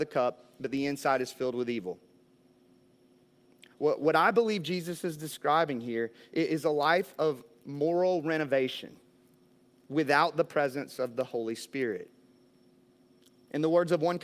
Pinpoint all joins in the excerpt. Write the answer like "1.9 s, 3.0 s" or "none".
none